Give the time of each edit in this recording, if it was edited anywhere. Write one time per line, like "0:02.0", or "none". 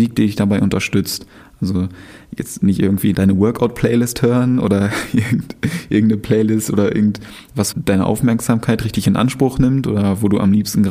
0:03.1
0:07.7

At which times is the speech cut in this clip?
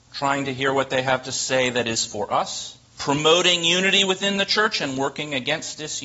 0:02.8

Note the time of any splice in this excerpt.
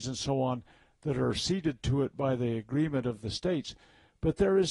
none

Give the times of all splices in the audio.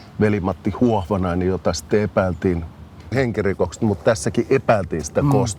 0:03.1

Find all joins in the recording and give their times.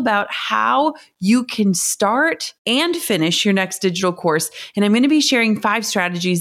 0:02.6

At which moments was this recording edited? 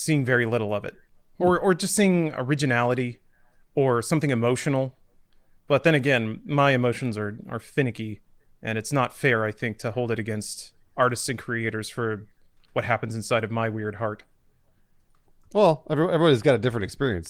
0:01.4

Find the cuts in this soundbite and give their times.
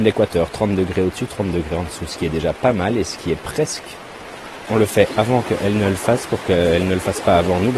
0:04.6

